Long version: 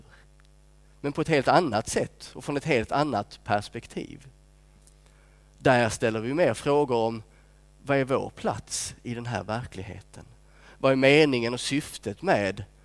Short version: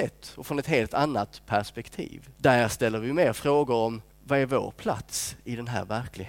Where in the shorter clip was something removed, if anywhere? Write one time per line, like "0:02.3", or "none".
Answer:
0:02.4
0:04.1